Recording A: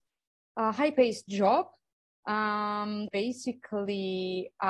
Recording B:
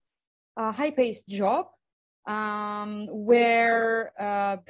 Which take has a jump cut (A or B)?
A